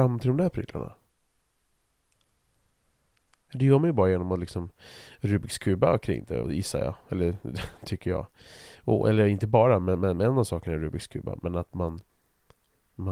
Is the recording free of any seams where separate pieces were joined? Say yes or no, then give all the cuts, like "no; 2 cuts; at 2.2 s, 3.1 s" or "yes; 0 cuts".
no; 1 cut; at 6.4 s